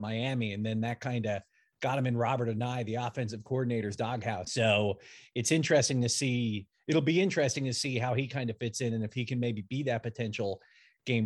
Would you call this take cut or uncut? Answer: cut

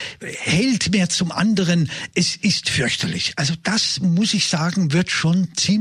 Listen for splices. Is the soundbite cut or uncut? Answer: uncut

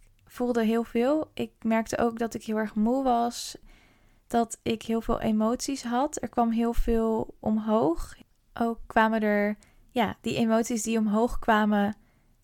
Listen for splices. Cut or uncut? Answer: uncut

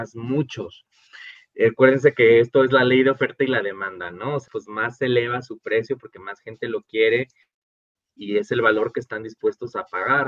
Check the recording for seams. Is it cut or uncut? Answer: cut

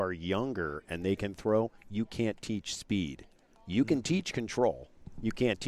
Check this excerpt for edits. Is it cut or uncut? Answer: uncut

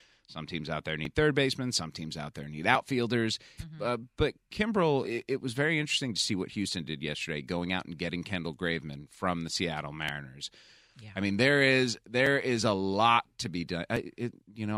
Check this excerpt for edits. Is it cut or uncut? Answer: cut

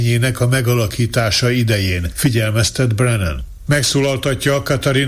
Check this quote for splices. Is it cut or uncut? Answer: uncut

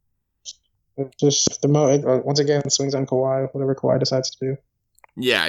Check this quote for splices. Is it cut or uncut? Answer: cut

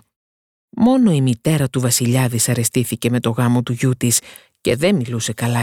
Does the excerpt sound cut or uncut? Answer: uncut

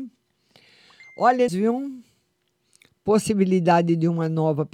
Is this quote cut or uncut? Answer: cut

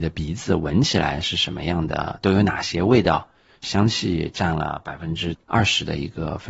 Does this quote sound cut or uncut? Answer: uncut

